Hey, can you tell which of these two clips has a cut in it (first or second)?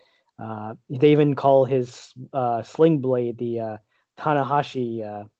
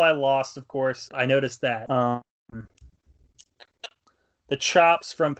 second